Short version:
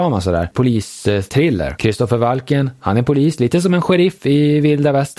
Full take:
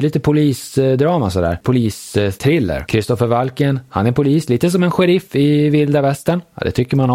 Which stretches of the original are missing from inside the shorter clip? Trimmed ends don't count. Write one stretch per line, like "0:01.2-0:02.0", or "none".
none

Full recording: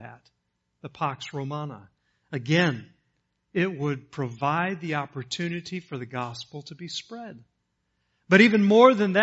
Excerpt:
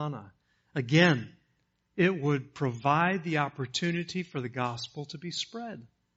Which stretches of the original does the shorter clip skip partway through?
none

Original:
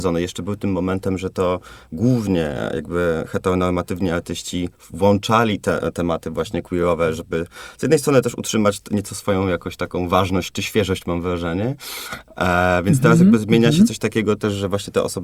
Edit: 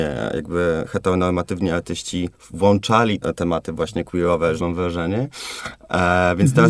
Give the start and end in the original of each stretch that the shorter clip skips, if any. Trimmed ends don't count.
0:05.6-0:05.8
0:07.2-0:11.0

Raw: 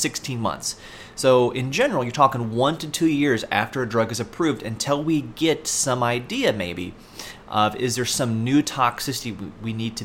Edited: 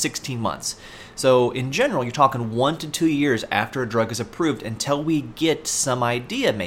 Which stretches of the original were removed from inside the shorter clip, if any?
none

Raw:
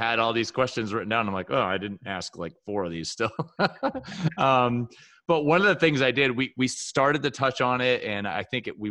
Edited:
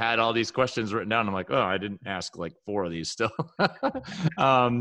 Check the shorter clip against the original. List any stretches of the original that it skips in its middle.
none

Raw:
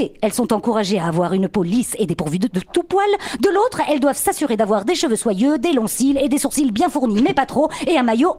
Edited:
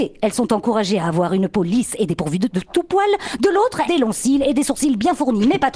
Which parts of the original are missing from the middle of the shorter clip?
0:03.9-0:05.6

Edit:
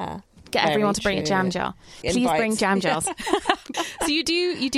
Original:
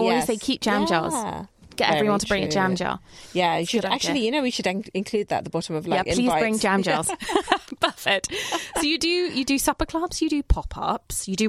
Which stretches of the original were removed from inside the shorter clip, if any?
0:03.3-0:06.0
0:07.8-0:08.5

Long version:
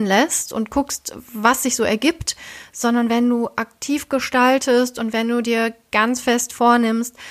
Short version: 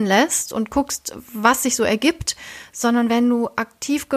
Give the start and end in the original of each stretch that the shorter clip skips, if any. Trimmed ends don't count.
none

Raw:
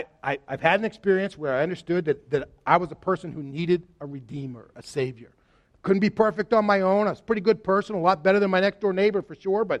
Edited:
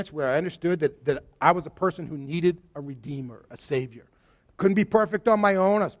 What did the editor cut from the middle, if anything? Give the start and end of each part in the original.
none

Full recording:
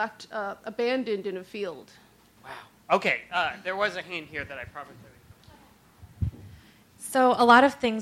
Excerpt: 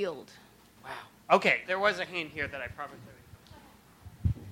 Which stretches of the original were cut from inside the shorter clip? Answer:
0:03.2-0:03.6

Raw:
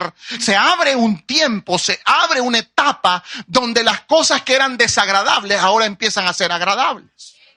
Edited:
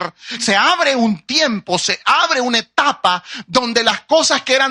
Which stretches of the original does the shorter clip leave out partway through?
none

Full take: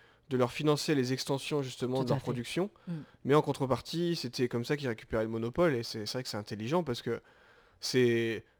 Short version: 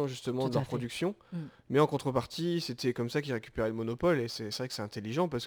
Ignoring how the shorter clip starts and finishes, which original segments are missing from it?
none

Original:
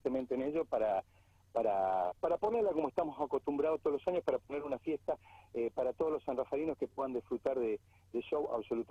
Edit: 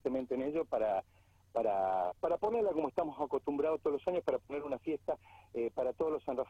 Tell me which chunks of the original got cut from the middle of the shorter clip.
none

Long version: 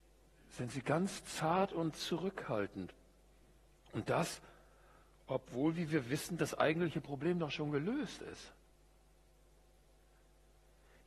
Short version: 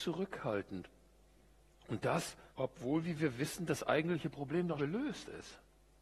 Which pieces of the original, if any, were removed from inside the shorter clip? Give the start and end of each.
0:04.5-0:05.2
0:07.5-0:07.7

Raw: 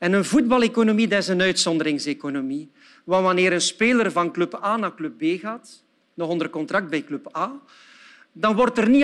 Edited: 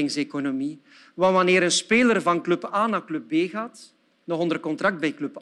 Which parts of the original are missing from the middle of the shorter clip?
none

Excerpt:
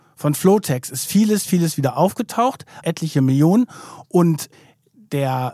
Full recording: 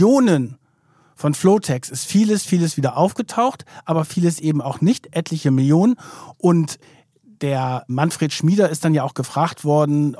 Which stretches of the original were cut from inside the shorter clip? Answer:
0:03.8-0:05.1

